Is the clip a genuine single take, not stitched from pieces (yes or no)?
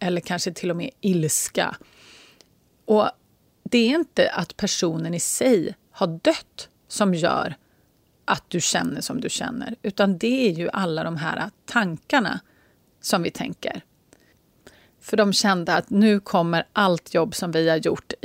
no